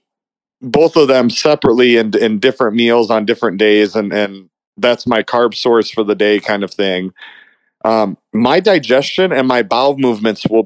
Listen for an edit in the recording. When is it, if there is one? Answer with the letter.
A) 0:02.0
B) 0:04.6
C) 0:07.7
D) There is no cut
D